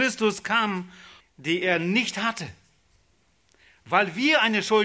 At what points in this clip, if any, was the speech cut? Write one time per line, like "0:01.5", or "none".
0:01.2